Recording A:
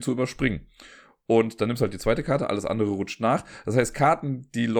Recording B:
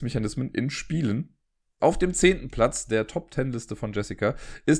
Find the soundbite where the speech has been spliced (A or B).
B